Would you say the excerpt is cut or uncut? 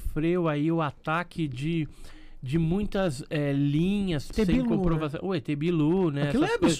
cut